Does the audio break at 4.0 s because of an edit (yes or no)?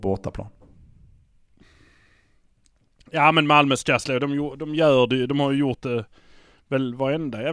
no